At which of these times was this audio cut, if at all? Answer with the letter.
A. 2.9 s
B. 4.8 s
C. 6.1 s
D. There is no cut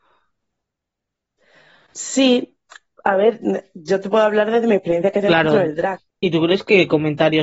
C